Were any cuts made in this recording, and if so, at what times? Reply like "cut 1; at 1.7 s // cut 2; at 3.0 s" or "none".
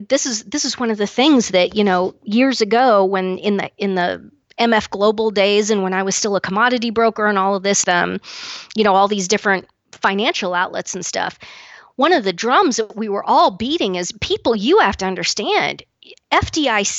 cut 1; at 7.8 s